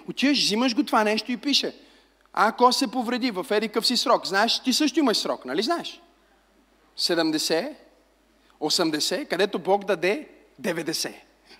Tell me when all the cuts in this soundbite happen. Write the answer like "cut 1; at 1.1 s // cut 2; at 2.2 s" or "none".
none